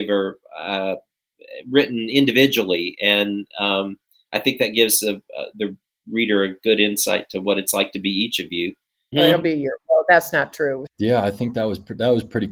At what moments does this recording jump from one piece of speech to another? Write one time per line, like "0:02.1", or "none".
0:09.1
0:10.9